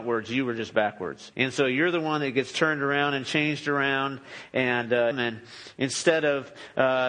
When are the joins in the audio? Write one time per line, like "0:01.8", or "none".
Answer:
0:01.3
0:05.1